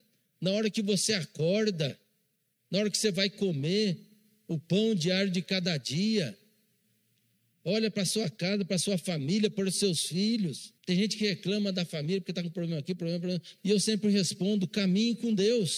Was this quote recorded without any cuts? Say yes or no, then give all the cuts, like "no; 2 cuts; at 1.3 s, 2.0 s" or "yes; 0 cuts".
no; 2 cuts; at 10.8 s, 13.6 s